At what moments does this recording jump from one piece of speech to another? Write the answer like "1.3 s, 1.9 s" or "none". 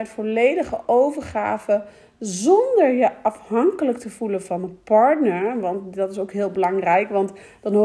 none